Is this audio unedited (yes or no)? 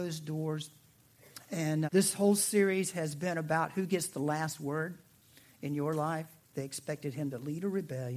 no